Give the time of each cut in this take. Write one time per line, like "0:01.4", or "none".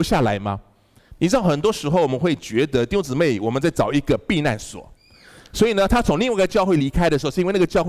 none

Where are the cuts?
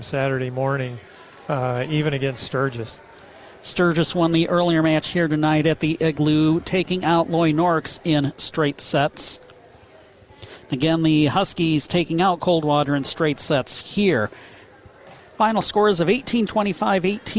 0:15.2
0:16.5

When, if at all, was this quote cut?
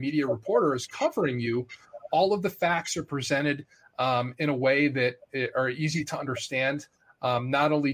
none

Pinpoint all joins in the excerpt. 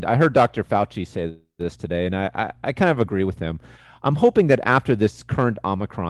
none

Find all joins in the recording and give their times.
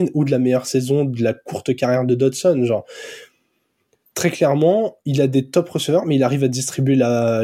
none

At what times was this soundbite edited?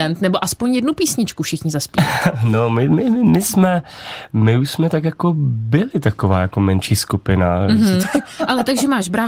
0:08.0

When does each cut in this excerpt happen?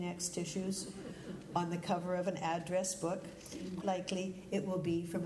0:03.8

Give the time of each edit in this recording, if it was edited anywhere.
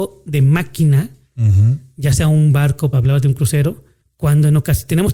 0:02.9

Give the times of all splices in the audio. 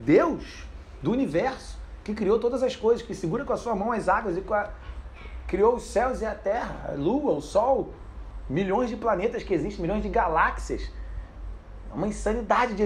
none

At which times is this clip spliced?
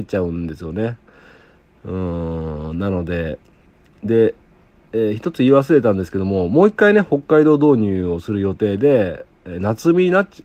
none

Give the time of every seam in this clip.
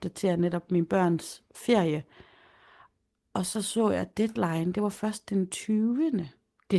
none

